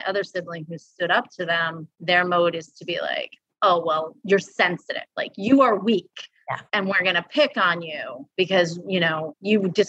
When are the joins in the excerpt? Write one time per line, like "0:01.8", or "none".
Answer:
none